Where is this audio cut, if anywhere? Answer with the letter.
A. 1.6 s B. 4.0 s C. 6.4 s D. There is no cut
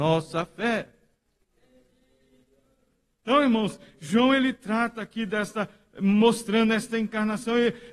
D